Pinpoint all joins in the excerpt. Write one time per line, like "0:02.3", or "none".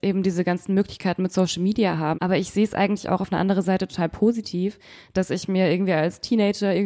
0:02.1